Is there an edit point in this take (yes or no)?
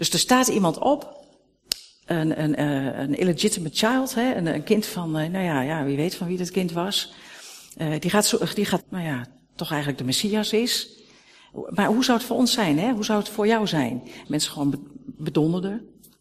yes